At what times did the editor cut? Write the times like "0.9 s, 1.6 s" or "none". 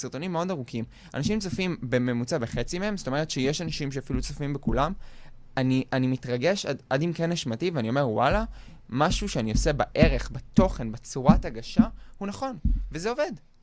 none